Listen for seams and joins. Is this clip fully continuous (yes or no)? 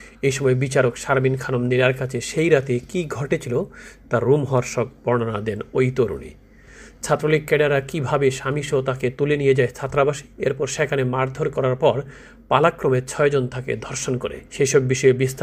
no